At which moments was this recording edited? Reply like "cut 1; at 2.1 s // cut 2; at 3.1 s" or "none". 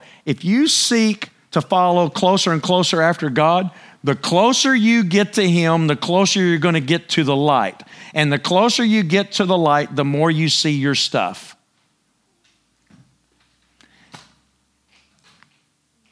none